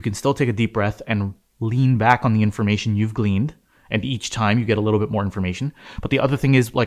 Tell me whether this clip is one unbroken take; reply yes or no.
yes